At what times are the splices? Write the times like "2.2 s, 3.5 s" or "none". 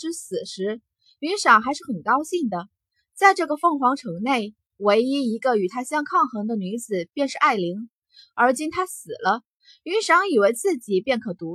none